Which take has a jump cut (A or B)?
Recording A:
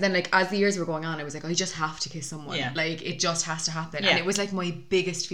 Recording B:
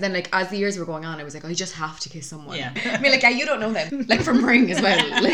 B